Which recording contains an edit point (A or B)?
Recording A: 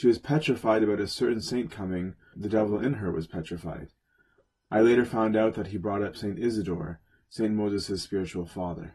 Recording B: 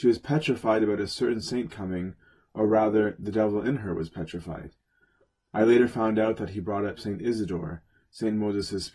A